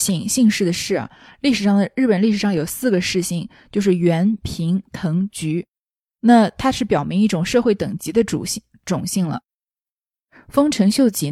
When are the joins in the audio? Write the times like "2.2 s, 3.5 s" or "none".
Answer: none